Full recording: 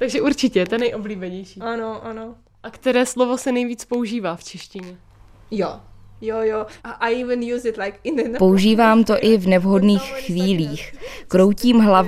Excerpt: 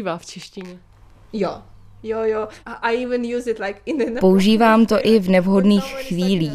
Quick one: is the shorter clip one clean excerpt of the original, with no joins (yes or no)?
yes